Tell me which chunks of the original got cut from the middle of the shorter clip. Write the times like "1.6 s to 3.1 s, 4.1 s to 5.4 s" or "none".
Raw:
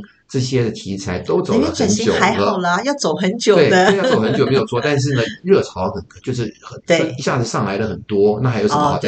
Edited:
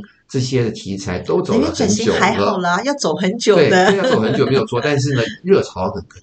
none